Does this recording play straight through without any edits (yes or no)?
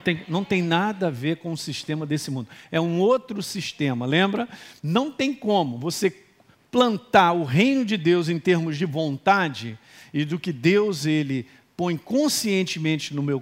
no